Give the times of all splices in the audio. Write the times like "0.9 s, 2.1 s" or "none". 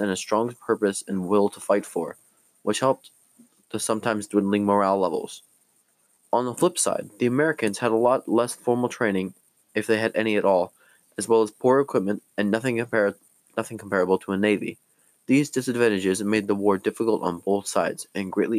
none